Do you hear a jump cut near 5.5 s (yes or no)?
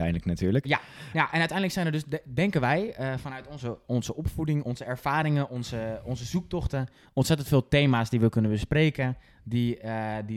no